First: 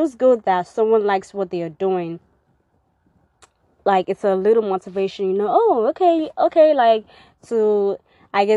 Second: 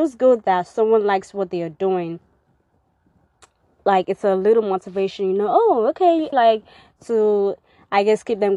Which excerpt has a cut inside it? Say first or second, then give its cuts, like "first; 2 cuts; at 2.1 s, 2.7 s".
second; 1 cut; at 6.3 s